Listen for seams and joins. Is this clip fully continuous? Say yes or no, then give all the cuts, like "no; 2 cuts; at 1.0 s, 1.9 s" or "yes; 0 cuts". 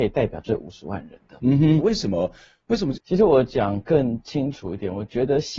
no; 2 cuts; at 1.8 s, 2.9 s